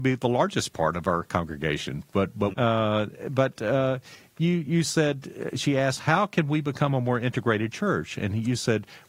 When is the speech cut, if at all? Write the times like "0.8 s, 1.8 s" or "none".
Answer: 2.5 s